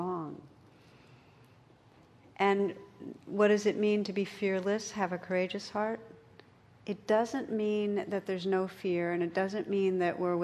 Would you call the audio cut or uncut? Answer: uncut